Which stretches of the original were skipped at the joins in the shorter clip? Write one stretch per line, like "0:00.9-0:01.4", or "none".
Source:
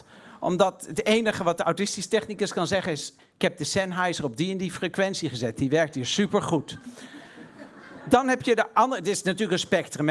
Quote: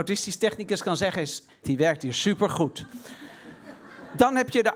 0:03.3-0:05.5